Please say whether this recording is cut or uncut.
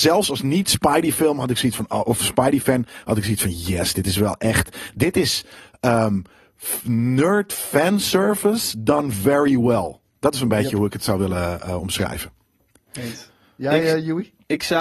uncut